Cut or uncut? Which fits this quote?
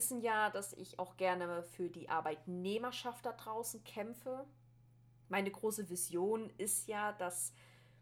uncut